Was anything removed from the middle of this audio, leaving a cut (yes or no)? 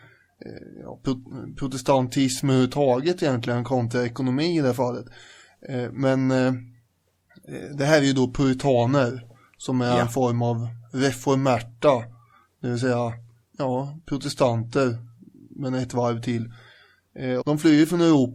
yes